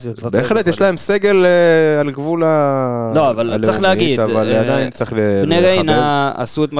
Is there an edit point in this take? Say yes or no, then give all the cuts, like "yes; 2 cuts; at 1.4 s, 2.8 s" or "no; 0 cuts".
no; 0 cuts